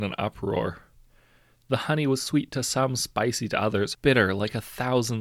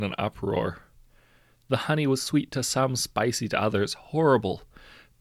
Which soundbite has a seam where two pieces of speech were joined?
first; 1 cut; at 3.9 s

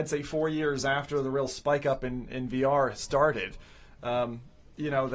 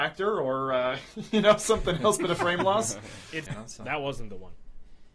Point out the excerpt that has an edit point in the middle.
second; 1 cut; at 3.5 s

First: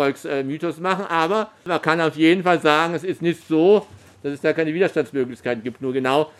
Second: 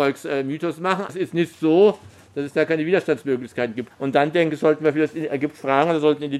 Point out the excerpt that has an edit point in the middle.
second; 2 cuts; at 1.1 s, 3.9 s

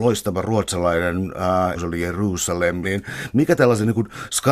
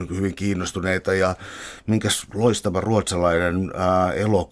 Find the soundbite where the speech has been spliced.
first; 2 cuts; at 1.7 s, 2.8 s

